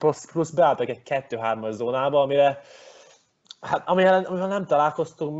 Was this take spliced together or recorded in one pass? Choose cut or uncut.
uncut